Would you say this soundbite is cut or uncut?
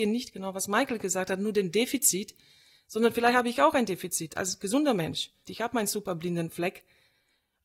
cut